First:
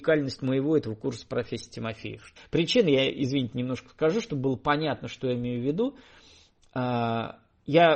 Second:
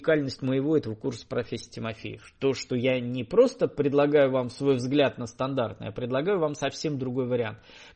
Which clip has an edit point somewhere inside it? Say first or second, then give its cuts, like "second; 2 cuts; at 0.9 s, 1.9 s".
first; 1 cut; at 2.4 s